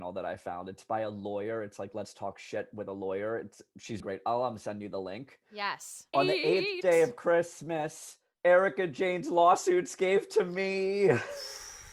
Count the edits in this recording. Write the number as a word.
two